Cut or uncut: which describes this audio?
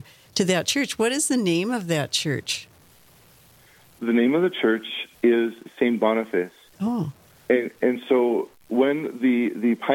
uncut